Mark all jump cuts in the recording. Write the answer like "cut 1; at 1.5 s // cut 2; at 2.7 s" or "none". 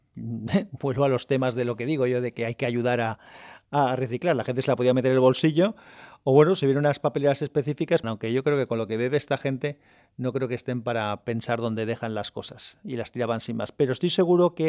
cut 1; at 8.0 s